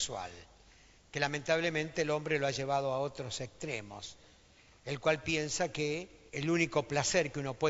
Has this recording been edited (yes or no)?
yes